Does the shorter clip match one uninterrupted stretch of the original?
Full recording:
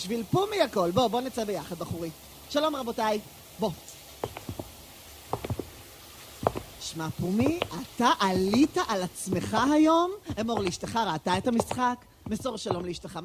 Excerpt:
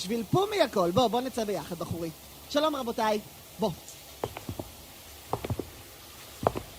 yes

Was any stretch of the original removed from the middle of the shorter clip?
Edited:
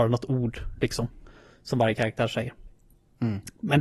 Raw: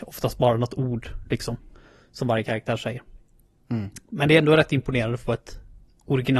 no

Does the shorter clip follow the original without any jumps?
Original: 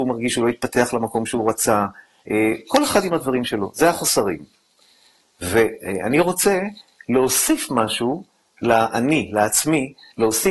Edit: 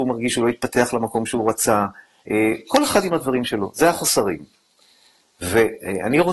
yes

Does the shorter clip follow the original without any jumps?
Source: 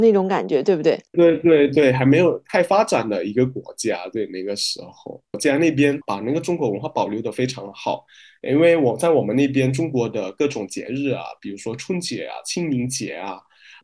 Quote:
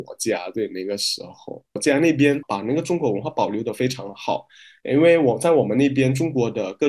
yes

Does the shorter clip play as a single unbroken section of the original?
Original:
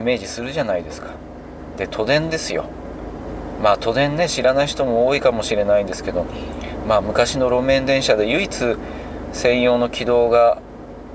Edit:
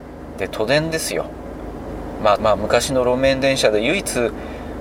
no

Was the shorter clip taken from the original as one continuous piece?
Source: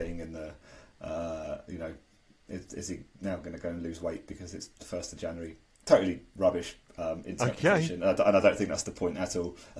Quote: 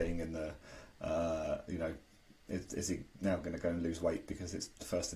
yes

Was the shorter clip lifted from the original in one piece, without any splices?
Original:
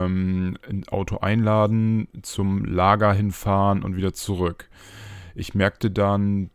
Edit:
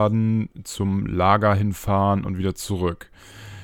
yes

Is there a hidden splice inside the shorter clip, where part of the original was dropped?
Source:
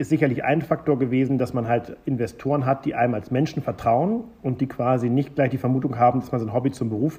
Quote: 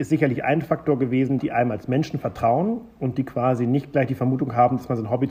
yes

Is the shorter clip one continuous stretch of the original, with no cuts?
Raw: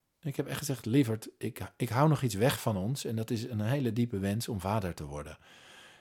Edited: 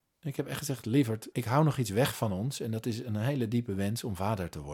no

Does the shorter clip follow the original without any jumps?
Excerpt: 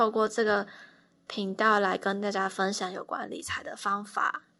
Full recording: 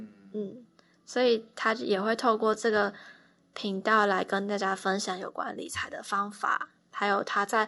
yes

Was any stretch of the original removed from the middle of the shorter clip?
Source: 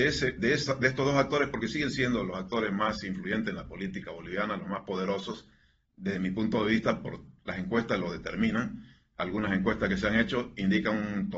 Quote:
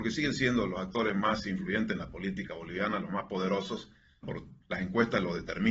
yes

